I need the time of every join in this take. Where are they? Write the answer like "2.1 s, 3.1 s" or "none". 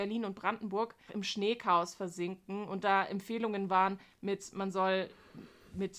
1.1 s